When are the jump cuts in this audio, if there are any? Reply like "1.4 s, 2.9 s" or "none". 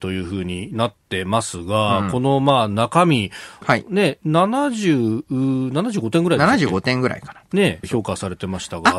3.6 s, 7.8 s